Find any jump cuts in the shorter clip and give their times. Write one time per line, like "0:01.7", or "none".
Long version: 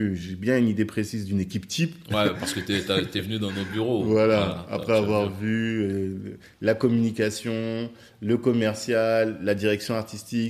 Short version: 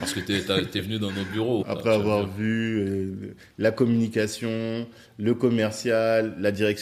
0:01.6